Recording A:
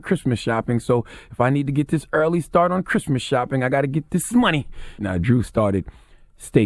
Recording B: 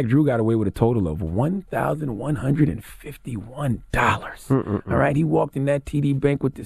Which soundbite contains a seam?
A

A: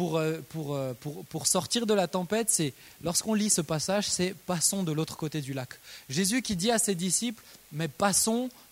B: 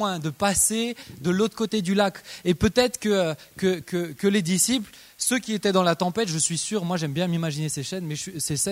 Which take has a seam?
B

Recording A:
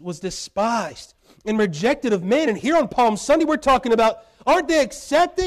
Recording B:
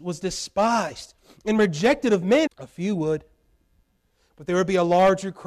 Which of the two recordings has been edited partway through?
B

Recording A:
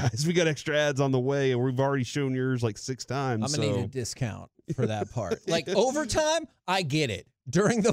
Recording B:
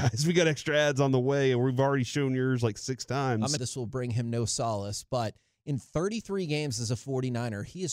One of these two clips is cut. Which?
B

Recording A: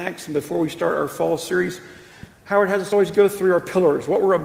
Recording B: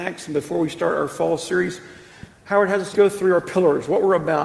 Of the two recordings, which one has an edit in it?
B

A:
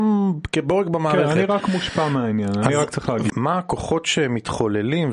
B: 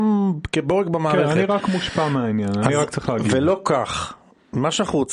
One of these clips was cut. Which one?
A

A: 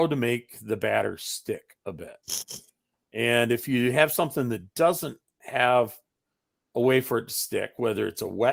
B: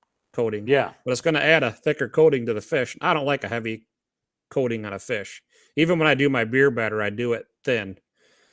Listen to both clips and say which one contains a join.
B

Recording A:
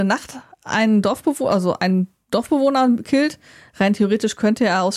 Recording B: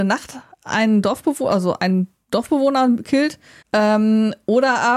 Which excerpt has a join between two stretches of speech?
B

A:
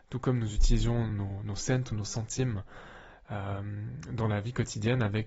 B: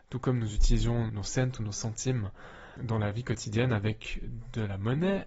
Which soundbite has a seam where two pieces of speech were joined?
B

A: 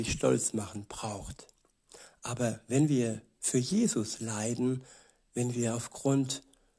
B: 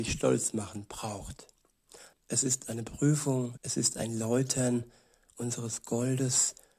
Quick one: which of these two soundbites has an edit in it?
B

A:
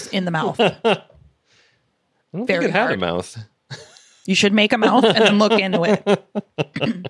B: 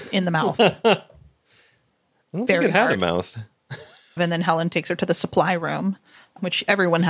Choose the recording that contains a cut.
B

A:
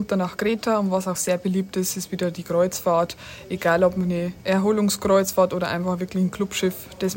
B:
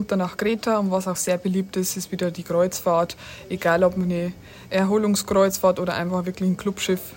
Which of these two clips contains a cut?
A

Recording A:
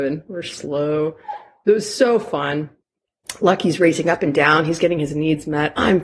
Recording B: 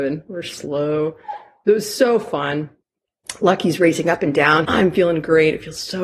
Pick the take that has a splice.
B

